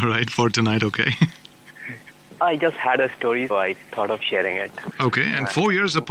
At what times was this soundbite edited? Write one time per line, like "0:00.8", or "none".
0:03.5
0:04.9